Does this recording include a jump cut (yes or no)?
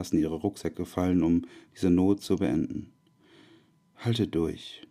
no